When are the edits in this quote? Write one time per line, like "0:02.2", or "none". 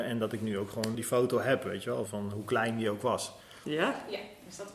0:00.9
0:02.1
0:03.6